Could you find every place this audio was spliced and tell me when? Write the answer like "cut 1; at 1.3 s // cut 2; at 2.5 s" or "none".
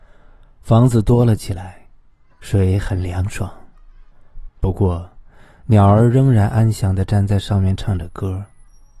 cut 1; at 2.3 s // cut 2; at 4.5 s